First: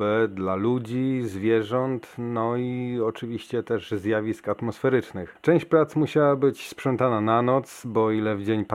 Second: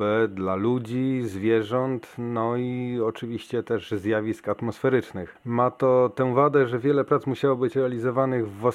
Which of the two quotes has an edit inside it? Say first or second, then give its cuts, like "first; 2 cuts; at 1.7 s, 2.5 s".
first; 1 cut; at 5.4 s